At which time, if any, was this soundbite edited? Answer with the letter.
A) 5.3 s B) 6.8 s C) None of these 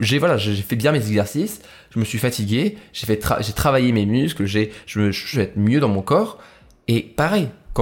A